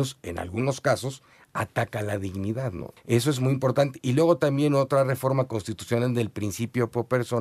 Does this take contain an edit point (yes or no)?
yes